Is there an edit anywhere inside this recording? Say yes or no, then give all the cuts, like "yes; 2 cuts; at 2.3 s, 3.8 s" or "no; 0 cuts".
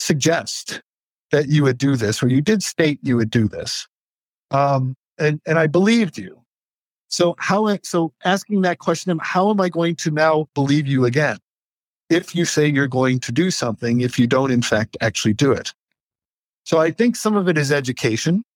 no; 0 cuts